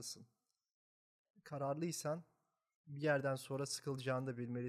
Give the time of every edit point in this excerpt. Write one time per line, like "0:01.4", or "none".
none